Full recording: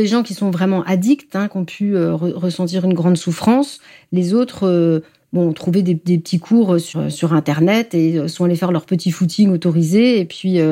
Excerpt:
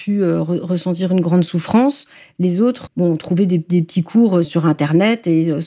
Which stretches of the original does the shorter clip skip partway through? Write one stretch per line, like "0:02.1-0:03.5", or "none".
0:04.6-0:05.2
0:06.8-0:07.1